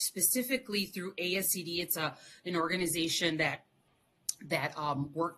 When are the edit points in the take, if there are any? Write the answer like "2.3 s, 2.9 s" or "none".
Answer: none